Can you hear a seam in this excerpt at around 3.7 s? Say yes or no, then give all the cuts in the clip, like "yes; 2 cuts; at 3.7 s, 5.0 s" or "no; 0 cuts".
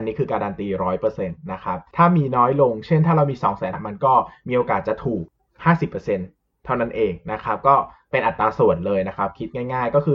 yes; 1 cut; at 3.7 s